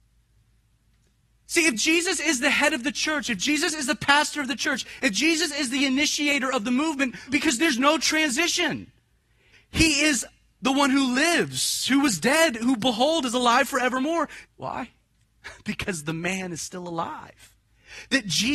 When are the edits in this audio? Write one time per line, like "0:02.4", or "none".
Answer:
0:07.3
0:09.5
0:14.4